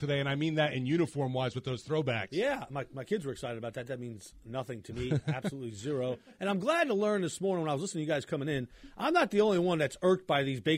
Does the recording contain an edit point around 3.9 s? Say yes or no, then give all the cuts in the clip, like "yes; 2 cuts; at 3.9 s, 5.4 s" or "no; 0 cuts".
no; 0 cuts